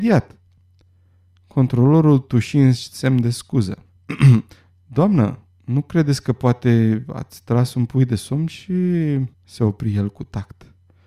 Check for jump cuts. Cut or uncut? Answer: cut